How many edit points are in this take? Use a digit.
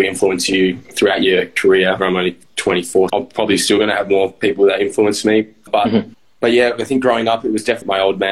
2